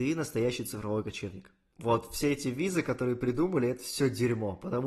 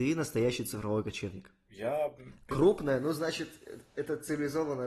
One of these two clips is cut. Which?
second; 1 cut; at 1.7 s

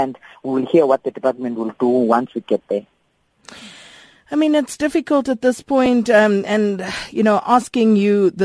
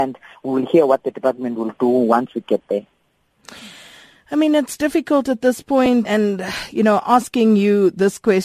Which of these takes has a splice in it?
second; 1 cut; at 6.0 s

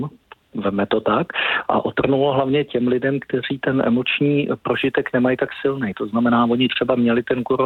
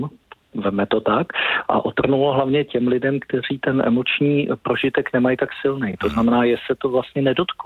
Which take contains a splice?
first; 1 cut; at 5.9 s

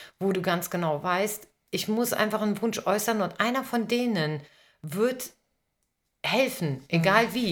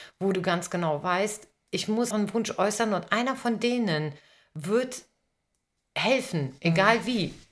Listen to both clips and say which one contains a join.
second; 1 cut; at 2.1 s

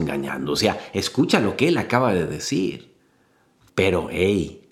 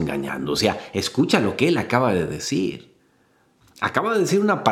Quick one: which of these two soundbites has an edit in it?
first; 1 cut; at 3.7 s

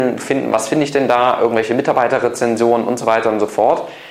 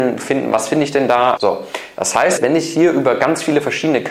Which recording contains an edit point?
second; 2 cuts; at 1.4 s, 2.4 s

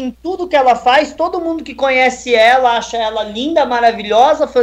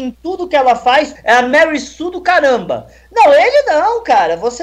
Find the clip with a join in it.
second; 1 cut; at 1.2 s

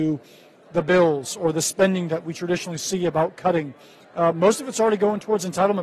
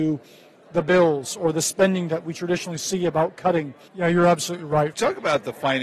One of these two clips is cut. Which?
second; 2 cuts; at 3.9 s, 4.9 s

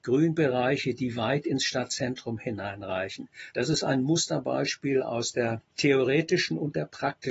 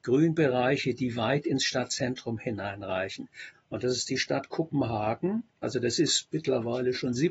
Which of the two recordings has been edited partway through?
second; 2 cuts; at 3.5 s, 5.6 s

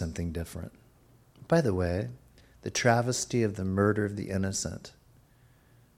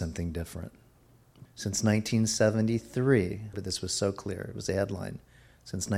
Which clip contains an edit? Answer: second; 2 cuts; at 1.5 s, 3.5 s

